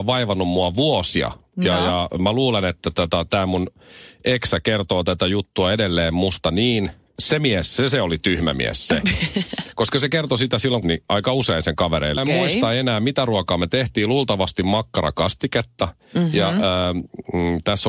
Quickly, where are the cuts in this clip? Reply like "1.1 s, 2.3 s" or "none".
7.2 s, 10.8 s, 12.2 s